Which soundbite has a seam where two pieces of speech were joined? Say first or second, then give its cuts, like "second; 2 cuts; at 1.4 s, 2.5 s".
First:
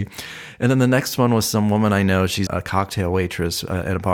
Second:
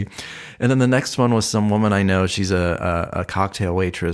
first; 1 cut; at 2.5 s